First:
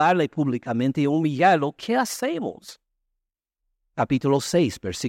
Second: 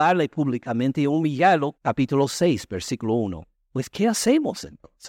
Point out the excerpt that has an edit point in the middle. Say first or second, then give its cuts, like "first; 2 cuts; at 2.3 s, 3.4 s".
second; 2 cuts; at 1.7 s, 3.5 s